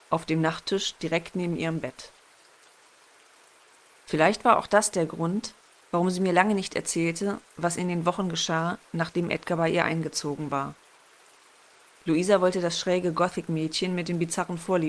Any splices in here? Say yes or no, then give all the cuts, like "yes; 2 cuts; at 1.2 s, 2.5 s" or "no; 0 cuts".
no; 0 cuts